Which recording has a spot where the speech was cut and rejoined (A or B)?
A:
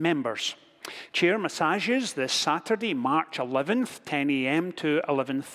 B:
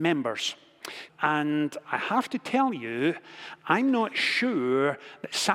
B